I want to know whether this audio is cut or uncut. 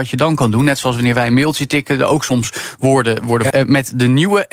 cut